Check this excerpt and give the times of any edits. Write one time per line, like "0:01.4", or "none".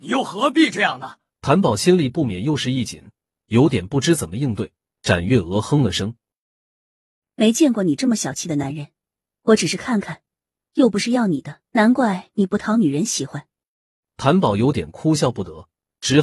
0:01.3
0:11.7

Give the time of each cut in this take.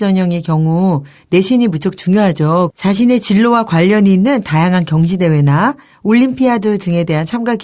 0:02.7

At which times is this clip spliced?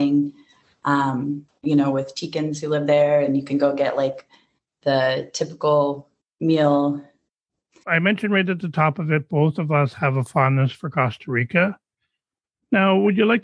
0:01.5
0:07.8

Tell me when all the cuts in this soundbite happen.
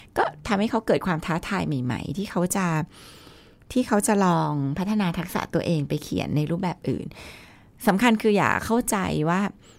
none

